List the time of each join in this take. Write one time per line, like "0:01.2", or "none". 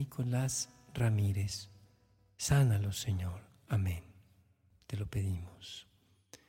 none